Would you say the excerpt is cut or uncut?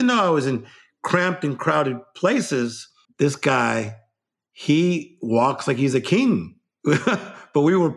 cut